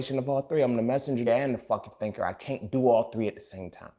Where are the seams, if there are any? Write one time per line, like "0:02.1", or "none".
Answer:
0:01.3